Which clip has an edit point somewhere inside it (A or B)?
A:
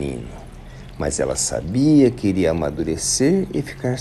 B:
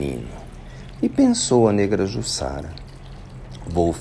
B